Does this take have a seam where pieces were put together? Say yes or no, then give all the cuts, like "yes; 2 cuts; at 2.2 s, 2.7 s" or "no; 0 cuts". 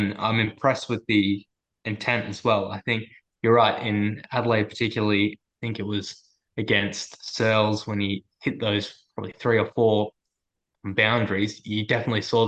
no; 0 cuts